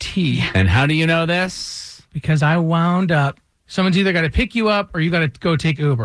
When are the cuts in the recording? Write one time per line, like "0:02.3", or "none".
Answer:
0:03.6